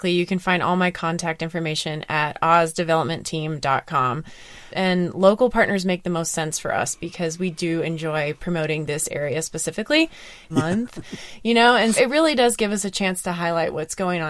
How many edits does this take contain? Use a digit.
3